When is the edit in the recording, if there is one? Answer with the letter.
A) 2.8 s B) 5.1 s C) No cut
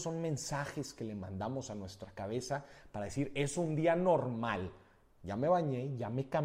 C